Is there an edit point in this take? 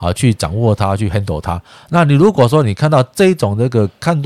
no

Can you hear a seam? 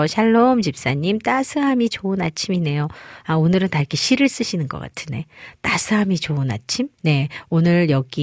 yes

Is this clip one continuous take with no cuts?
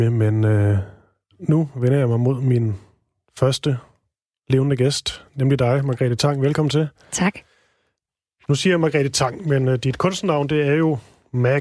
yes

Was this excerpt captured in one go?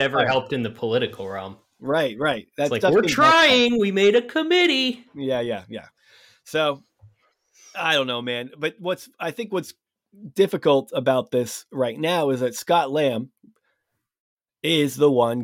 yes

